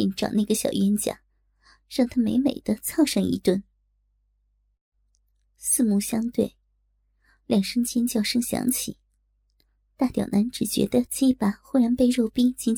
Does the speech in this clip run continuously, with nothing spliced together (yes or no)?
yes